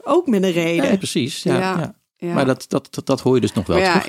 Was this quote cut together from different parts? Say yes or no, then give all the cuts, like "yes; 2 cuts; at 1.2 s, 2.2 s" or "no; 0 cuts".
no; 0 cuts